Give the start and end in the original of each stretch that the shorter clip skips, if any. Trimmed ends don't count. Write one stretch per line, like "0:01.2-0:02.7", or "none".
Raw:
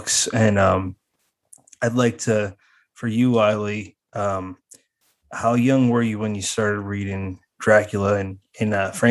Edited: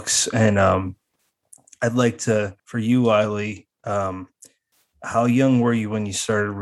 0:02.6-0:02.9